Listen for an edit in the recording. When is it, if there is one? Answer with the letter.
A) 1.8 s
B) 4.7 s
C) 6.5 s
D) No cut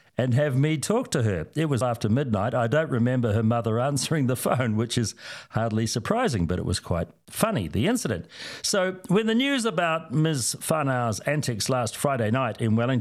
A